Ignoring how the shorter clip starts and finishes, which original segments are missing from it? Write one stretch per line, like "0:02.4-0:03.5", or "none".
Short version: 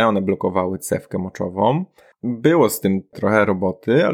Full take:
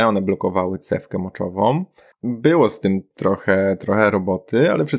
0:03.1-0:03.8